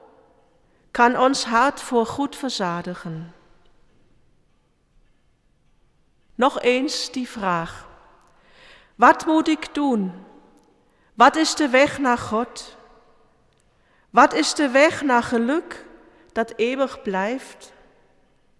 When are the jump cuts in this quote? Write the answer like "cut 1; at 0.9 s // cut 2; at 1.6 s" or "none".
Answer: none